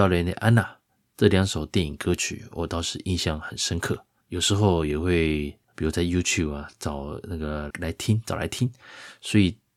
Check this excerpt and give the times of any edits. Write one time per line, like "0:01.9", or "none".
0:07.7